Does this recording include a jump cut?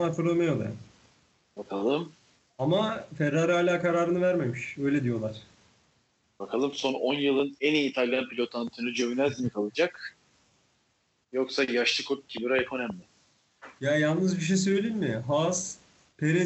no; 0 cuts

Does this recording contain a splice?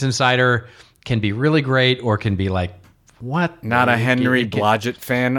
no; 0 cuts

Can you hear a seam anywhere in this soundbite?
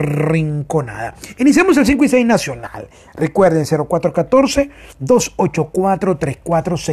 yes; 1 cut; at 4.9 s

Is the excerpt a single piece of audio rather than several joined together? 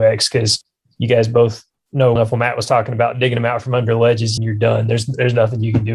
no; 2 cuts; at 2.2 s, 4.4 s

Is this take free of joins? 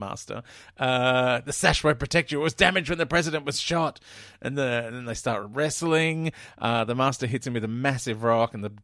yes; 0 cuts

